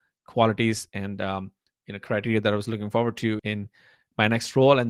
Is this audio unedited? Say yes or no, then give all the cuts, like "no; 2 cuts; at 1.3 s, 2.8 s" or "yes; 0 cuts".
no; 1 cut; at 3.4 s